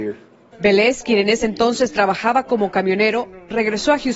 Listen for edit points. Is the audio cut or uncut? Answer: uncut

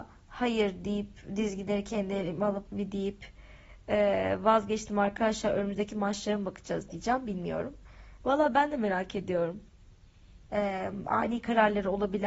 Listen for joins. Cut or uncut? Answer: cut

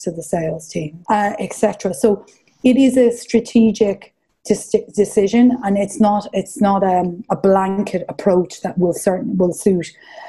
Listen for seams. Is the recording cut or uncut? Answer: uncut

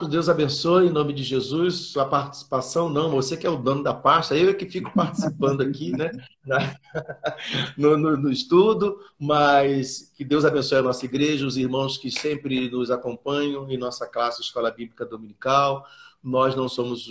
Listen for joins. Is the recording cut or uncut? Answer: uncut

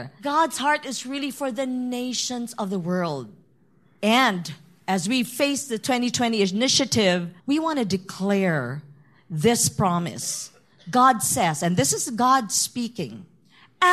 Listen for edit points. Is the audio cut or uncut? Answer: cut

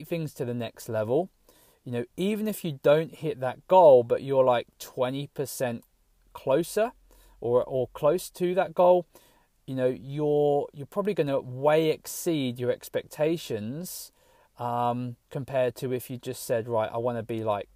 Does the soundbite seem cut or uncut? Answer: uncut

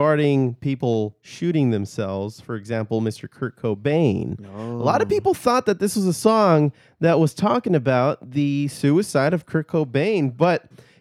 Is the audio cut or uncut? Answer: uncut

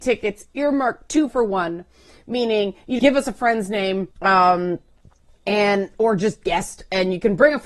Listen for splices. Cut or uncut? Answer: cut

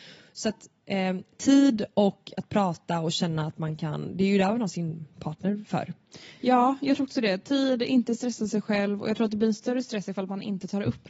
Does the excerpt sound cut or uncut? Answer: uncut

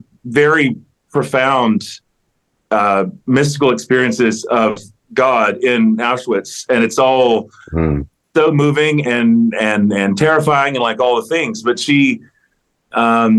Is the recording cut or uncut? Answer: cut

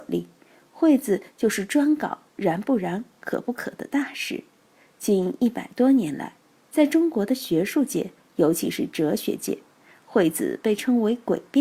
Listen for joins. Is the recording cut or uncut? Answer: uncut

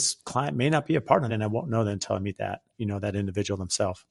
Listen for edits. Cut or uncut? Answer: cut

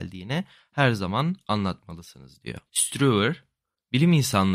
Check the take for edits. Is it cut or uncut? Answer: cut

